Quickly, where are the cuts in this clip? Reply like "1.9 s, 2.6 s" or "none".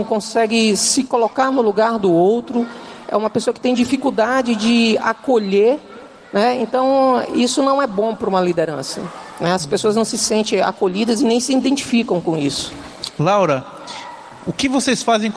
13.2 s